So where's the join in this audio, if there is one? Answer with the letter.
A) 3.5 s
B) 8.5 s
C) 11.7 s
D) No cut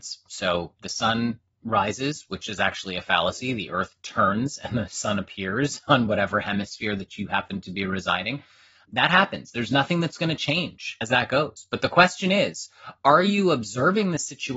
D